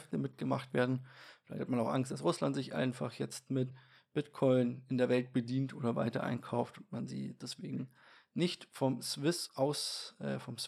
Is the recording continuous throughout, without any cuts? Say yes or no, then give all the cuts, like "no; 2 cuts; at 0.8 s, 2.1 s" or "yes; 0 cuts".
yes; 0 cuts